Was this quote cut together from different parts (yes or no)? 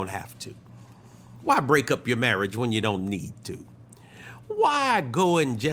no